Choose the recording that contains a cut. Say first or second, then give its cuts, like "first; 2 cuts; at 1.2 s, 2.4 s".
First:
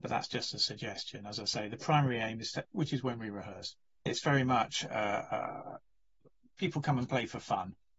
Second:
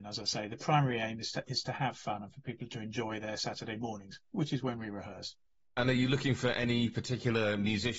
first; 2 cuts; at 2.6 s, 4.1 s